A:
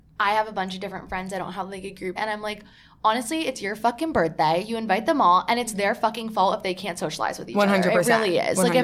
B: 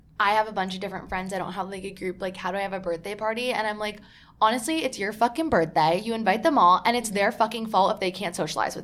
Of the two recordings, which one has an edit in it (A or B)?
A